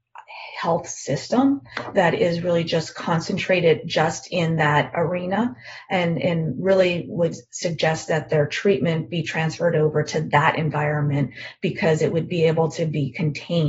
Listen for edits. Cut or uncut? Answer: uncut